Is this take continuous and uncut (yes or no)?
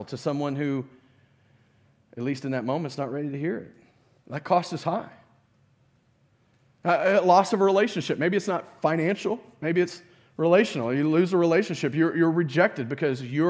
no